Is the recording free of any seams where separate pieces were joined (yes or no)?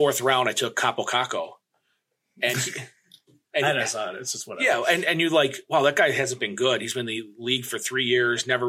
yes